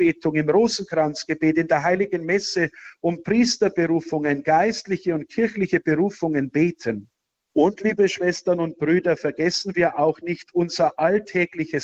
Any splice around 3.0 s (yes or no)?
no